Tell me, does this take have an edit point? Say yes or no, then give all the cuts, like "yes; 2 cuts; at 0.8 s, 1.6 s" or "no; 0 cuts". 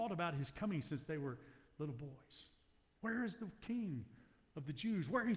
yes; 1 cut; at 2.9 s